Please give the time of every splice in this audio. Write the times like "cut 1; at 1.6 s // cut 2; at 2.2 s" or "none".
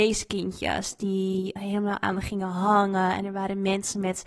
cut 1; at 1.6 s